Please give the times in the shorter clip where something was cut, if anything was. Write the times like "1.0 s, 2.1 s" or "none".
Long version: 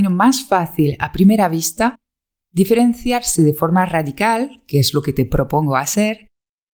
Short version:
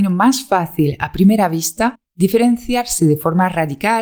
2.1 s